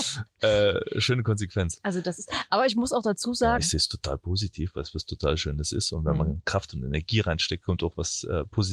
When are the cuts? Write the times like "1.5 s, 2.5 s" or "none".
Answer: 3.6 s